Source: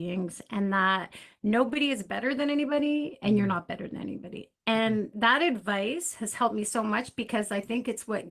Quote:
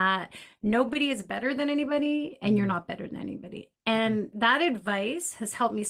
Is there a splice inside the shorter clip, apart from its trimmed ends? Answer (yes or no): no